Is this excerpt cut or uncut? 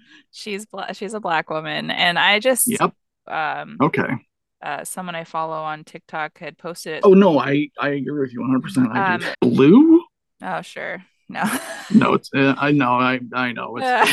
cut